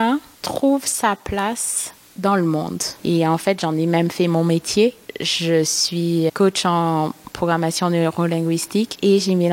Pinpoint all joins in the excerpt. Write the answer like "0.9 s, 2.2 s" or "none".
3.0 s, 6.3 s

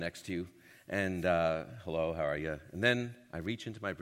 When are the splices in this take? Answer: none

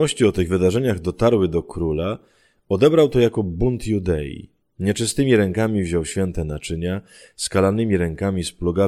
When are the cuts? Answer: 4.6 s

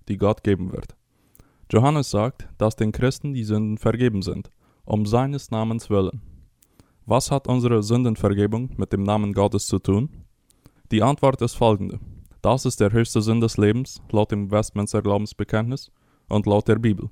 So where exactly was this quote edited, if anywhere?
10.8 s, 12.3 s

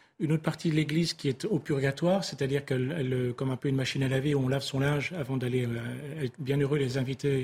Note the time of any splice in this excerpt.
none

